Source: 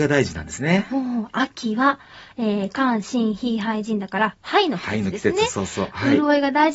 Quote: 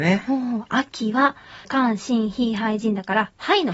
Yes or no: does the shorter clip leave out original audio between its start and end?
yes